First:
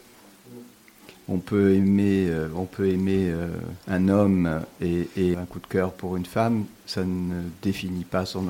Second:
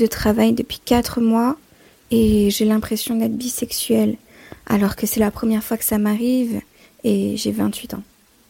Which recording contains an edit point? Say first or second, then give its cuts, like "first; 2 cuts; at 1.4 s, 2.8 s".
first; 2 cuts; at 3.8 s, 5.3 s